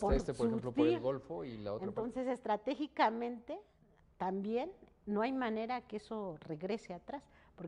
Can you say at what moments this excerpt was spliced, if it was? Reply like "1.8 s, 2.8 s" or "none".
none